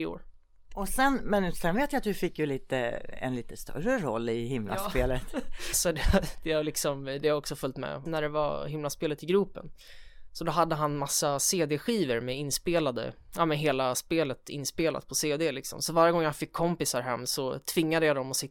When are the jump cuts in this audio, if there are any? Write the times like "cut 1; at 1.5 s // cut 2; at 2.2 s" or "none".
cut 1; at 5.7 s // cut 2; at 8.1 s